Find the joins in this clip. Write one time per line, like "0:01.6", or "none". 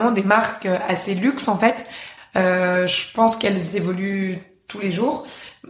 0:02.2